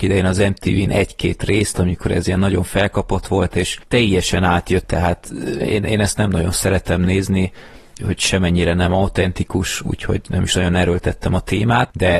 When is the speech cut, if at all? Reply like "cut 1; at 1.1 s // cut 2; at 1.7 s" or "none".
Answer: cut 1; at 4.8 s // cut 2; at 8.0 s